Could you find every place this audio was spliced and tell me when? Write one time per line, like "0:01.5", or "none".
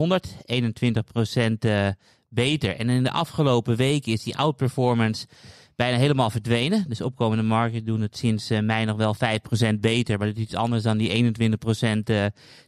none